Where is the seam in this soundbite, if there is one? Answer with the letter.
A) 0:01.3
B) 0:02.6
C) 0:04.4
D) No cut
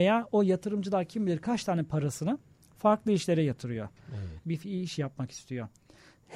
C